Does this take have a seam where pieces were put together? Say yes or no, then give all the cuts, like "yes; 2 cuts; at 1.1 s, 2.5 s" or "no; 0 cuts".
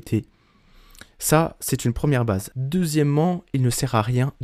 yes; 1 cut; at 2.5 s